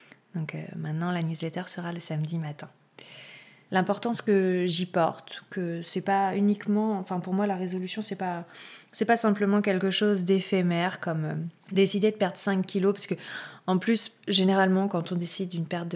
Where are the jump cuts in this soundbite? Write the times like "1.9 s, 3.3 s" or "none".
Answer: 3.7 s, 11.6 s